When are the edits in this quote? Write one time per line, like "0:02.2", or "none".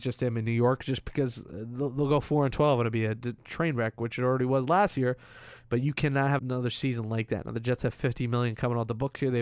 0:06.4